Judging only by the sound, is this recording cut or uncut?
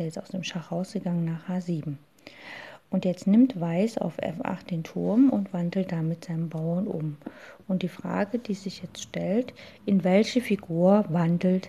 uncut